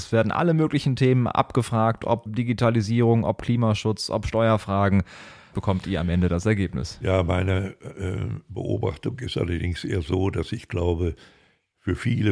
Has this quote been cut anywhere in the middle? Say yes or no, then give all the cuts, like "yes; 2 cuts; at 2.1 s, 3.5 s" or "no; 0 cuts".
yes; 2 cuts; at 2.3 s, 5.5 s